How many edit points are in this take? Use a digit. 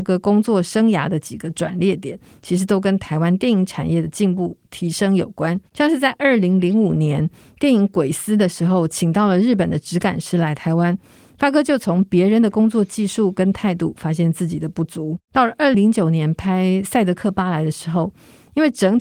1